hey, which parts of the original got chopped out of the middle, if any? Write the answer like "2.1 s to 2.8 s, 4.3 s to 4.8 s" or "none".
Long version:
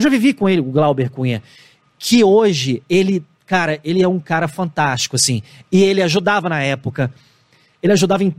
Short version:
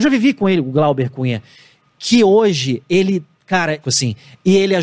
3.8 s to 5.1 s